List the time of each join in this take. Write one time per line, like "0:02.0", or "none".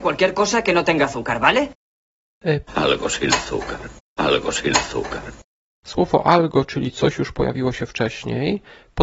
0:02.7
0:04.2